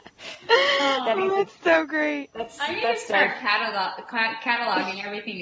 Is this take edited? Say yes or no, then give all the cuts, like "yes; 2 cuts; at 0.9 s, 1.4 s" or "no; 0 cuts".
no; 0 cuts